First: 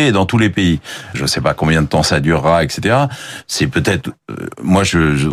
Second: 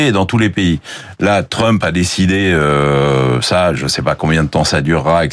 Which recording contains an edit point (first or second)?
first